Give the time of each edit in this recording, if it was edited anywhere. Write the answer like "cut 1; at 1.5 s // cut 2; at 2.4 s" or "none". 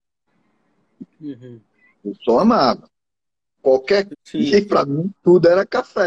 cut 1; at 1.9 s // cut 2; at 4.1 s